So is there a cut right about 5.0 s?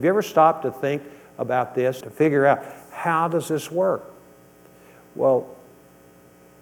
no; 1 cut; at 2.0 s

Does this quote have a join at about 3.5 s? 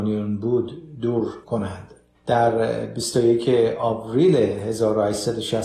no; 1 cut; at 1.4 s

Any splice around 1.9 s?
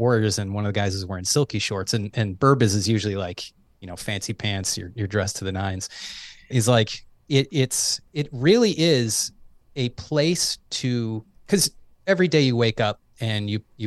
no; 2 cuts; at 6.5 s, 8.1 s

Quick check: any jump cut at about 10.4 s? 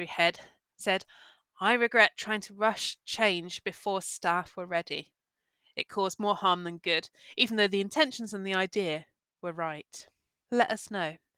yes; 1 cut; at 10.4 s

